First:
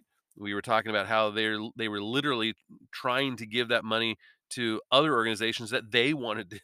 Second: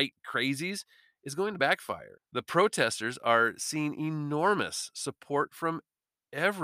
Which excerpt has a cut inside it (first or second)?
second